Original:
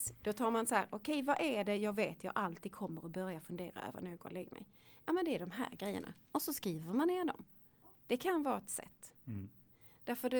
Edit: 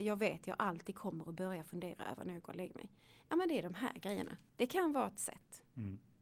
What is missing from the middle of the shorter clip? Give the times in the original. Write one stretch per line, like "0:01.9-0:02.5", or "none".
0:06.2-0:08.0